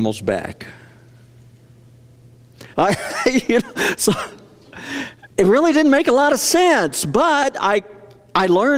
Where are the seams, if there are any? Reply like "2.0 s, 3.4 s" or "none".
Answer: 2.7 s, 5.3 s